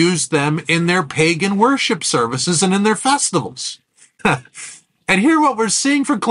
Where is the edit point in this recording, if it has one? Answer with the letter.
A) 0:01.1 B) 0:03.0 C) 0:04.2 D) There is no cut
C